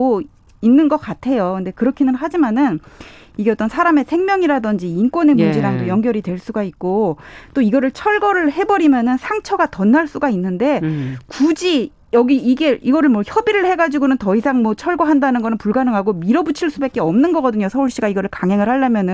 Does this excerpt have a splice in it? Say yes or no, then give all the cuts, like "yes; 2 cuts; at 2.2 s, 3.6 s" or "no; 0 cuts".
no; 0 cuts